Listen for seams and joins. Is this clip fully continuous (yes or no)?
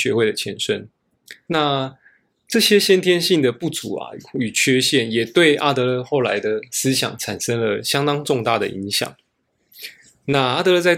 no